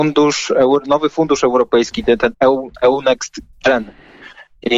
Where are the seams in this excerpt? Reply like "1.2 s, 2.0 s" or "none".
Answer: 2.3 s